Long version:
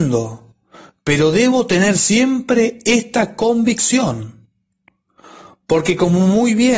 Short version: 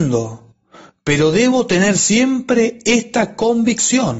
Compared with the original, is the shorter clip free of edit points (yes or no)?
yes